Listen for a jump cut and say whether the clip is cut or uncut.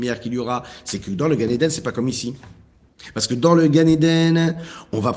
uncut